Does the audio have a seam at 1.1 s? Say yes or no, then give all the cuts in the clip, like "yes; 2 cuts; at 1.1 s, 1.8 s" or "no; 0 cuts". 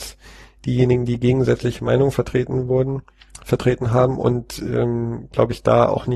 no; 0 cuts